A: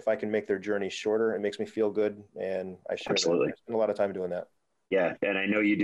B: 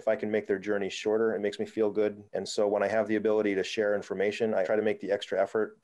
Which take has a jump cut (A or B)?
B